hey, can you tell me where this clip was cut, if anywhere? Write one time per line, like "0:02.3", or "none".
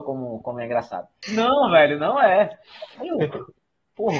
0:01.2
0:03.0